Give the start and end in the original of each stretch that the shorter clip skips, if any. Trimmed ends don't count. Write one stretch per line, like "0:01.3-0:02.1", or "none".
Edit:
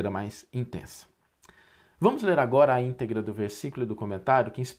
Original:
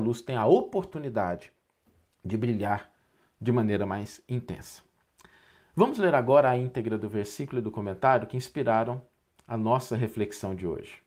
none